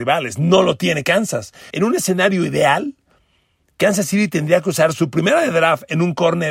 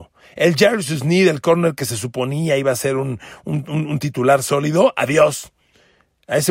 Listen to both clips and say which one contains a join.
first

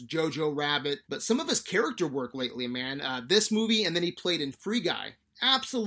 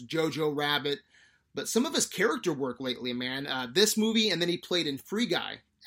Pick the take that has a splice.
first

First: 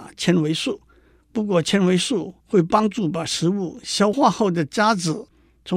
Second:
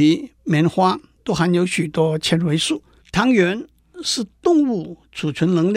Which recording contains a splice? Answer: second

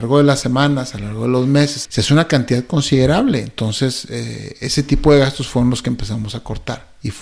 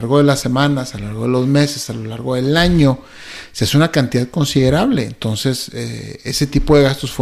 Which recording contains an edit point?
first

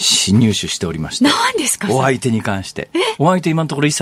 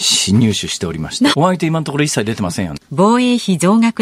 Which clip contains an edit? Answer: second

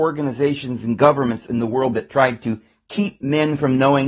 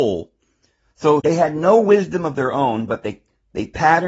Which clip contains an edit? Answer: second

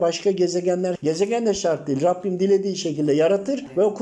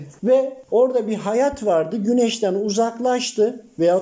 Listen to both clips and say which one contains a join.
first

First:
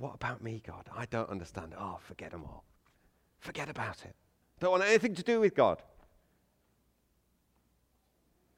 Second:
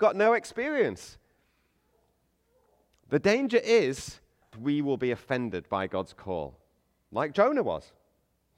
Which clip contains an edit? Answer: second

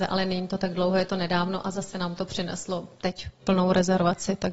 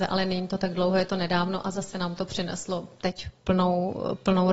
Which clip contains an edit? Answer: first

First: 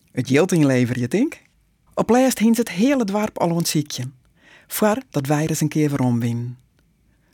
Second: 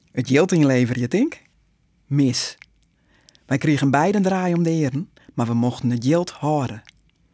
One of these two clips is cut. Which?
first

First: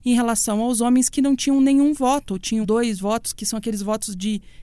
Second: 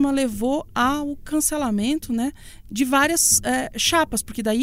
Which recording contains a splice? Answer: first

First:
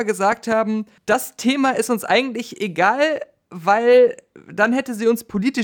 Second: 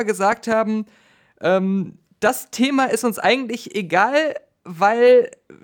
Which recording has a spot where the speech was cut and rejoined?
first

